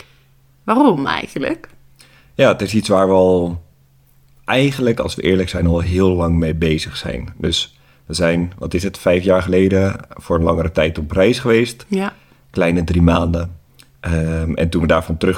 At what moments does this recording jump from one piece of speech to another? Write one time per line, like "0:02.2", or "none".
none